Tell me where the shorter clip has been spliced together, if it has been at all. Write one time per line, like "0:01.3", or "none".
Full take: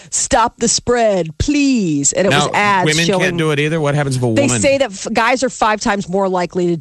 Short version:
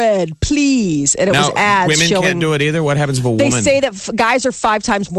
none